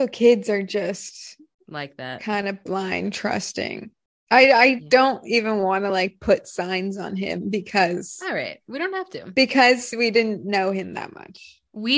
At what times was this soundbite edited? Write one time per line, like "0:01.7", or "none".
none